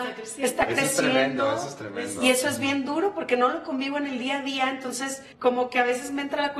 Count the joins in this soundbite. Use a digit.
1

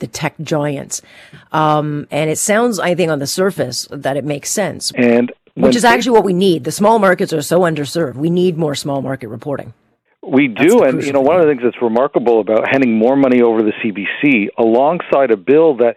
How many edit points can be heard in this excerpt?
1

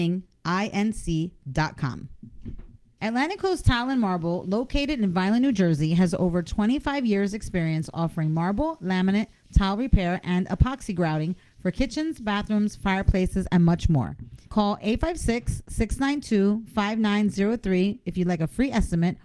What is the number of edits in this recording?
1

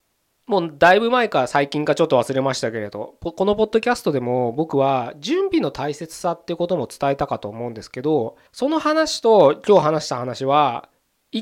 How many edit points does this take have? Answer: 1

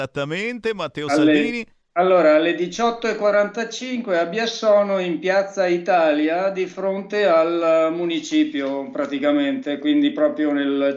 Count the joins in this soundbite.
0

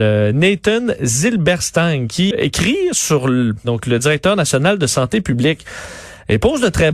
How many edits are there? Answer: 2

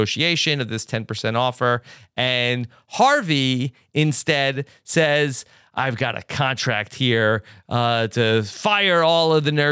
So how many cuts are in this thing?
0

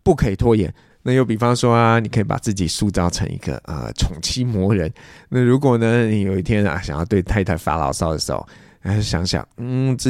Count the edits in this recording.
1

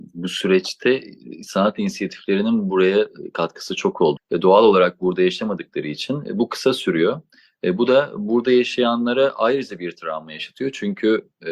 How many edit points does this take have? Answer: 1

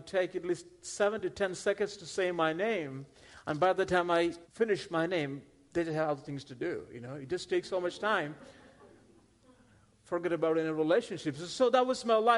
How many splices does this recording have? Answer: 1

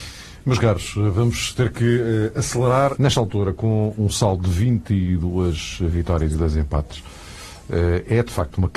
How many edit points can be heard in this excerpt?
2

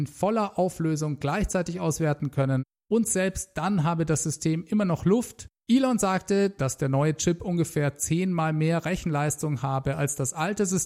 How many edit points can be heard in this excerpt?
1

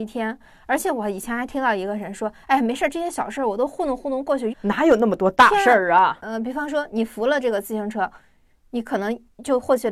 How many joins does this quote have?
2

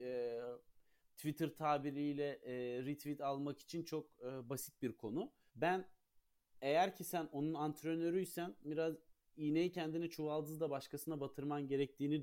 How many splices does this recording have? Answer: 2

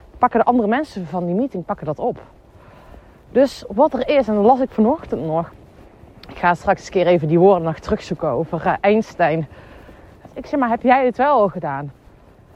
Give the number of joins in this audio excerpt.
1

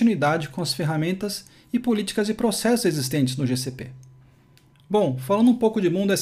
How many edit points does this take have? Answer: 1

